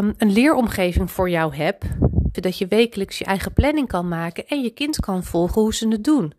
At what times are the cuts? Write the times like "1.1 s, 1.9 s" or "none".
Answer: 2.3 s